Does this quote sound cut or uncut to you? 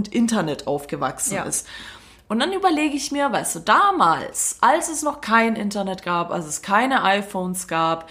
uncut